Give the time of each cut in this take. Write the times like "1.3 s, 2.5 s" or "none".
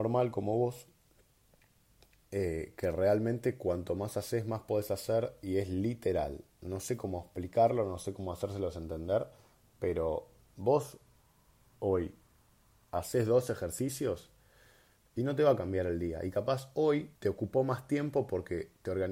17.2 s